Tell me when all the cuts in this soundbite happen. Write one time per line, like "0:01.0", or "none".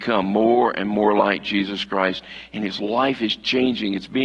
none

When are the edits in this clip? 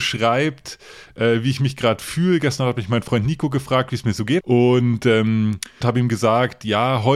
0:04.4
0:05.8

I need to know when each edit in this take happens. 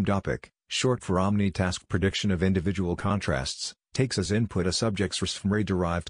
none

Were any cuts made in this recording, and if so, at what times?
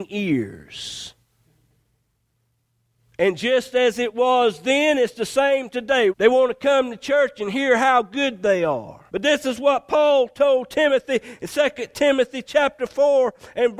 0:06.1
0:09.1

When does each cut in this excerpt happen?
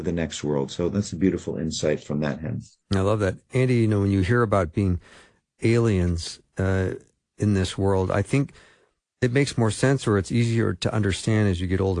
none

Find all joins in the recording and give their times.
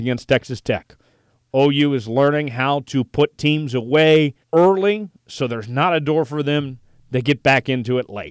0:04.4

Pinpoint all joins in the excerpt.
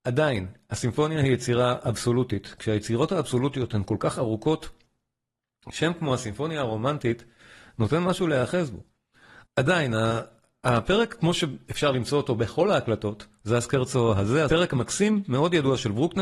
0:09.4
0:14.5

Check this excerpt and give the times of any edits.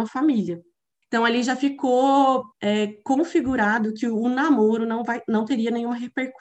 0:01.0
0:02.5

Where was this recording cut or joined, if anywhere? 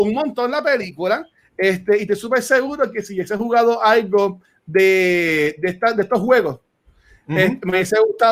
none

